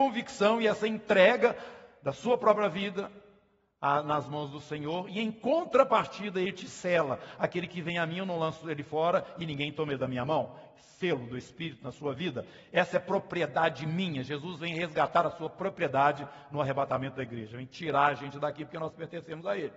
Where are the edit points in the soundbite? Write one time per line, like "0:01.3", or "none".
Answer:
none